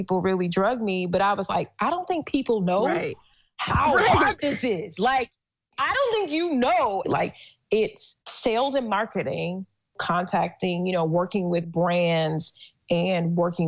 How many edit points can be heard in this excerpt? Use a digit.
2